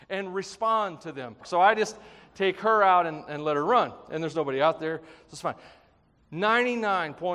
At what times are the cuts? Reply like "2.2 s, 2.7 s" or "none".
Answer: 1.4 s